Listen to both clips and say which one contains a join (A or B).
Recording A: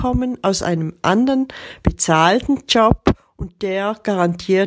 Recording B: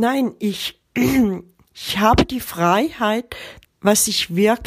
B